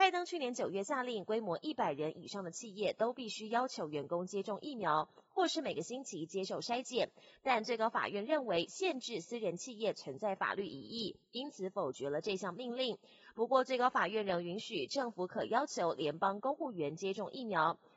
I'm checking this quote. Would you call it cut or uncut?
uncut